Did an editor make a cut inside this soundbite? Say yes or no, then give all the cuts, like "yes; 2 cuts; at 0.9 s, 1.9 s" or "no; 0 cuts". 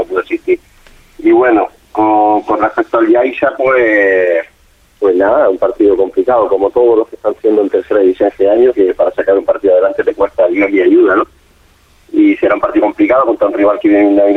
no; 0 cuts